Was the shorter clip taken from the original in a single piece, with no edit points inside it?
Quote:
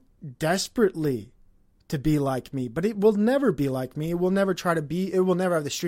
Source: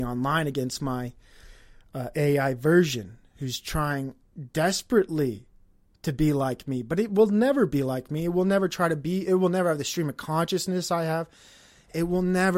yes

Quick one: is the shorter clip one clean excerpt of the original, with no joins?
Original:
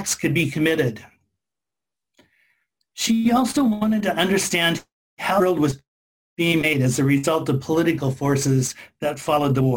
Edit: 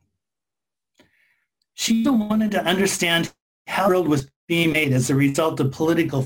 no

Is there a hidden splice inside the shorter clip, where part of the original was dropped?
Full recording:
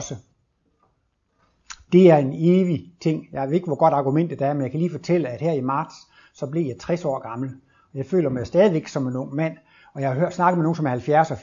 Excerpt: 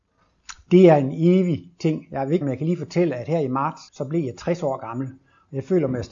yes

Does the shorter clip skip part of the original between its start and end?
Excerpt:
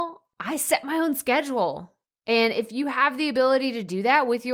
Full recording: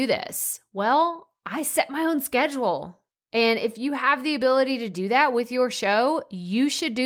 no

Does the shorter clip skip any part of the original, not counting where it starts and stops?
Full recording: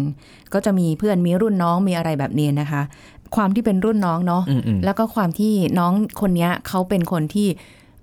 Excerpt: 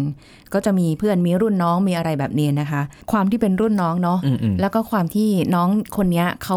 yes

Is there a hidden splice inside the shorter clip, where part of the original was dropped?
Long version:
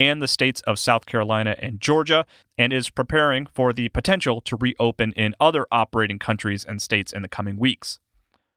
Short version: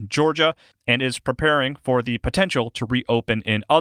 no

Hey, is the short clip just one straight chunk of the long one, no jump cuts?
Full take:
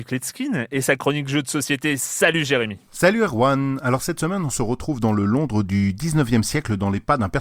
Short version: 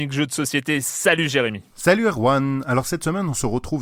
yes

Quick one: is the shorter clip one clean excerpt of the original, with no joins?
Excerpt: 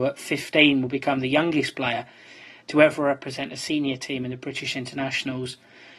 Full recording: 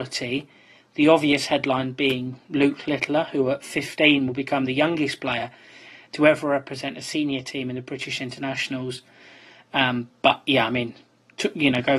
yes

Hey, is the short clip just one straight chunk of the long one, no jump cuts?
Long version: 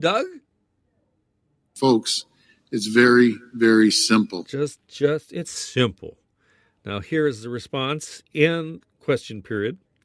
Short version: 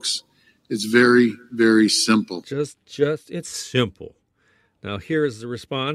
yes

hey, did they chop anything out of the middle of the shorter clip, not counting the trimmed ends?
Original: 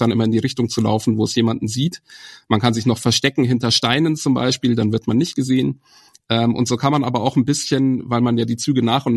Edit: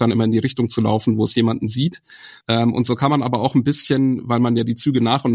yes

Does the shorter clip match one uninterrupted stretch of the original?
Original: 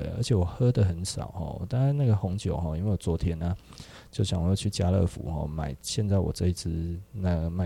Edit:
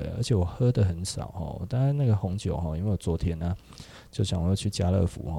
yes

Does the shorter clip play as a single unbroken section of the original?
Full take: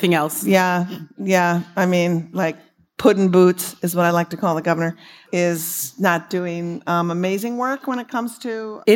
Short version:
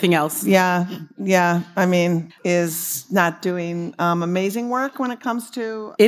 no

